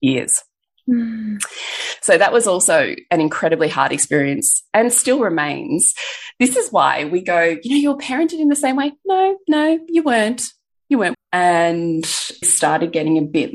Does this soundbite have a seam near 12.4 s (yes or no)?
yes